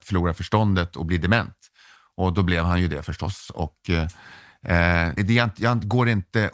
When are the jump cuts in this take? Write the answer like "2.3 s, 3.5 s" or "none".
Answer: 5.2 s